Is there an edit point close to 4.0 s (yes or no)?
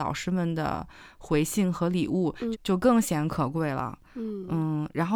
no